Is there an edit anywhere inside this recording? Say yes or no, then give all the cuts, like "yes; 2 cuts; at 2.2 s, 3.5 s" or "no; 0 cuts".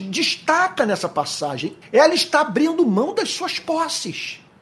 yes; 1 cut; at 1.8 s